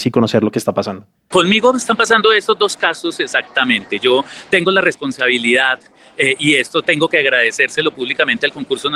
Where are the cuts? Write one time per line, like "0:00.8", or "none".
none

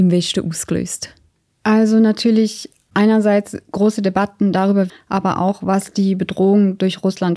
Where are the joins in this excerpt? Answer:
0:04.9

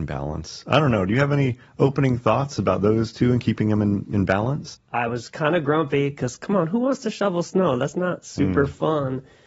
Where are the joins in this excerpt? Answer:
0:04.7

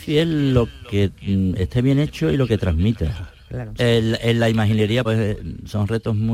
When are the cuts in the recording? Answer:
0:03.8
0:05.0

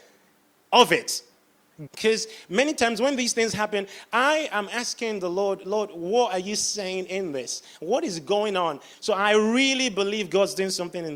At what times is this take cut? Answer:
0:01.9
0:08.9

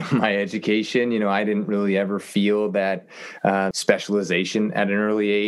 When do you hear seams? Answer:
0:03.7

